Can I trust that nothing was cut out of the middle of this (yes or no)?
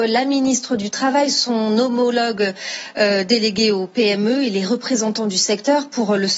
yes